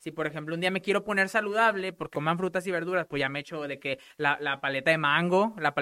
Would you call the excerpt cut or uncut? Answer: cut